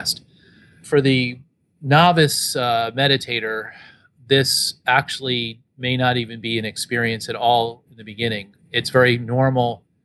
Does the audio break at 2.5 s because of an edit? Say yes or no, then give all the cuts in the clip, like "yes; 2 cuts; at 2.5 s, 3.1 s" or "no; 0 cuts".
no; 0 cuts